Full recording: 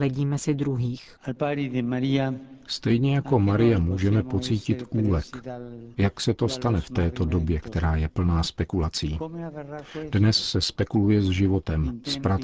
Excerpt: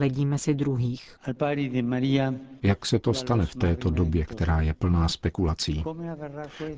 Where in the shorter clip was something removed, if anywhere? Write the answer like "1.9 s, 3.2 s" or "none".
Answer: 2.6 s